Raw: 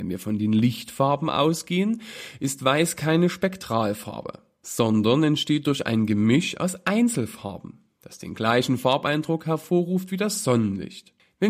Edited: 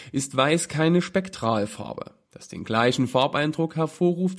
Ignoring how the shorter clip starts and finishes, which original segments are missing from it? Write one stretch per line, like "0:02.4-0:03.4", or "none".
0:04.5-0:07.9